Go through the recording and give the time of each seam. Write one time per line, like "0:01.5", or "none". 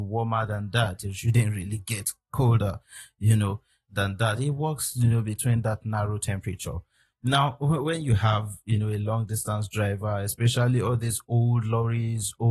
none